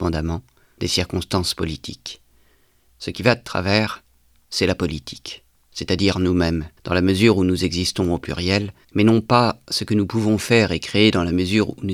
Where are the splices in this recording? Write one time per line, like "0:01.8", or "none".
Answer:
0:06.8
0:08.8